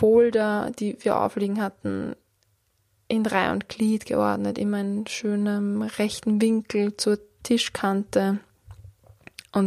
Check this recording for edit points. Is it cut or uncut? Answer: uncut